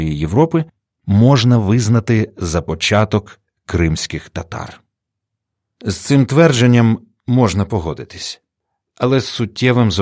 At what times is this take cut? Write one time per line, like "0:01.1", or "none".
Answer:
none